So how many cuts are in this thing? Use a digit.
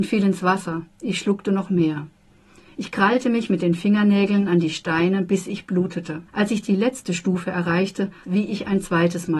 2